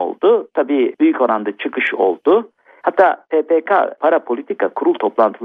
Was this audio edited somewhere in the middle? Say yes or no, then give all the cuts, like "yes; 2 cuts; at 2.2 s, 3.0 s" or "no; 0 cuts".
yes; 1 cut; at 2.8 s